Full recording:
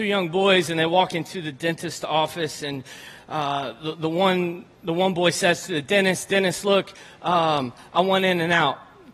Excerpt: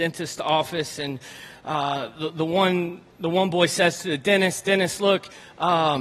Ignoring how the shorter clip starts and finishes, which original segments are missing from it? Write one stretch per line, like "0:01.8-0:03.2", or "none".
none